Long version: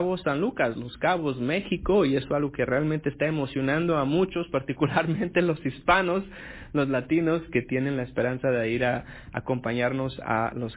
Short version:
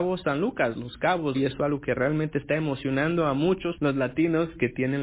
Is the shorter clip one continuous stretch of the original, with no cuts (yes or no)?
no